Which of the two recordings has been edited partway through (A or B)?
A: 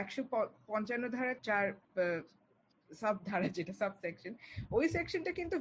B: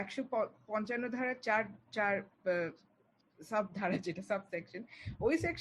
A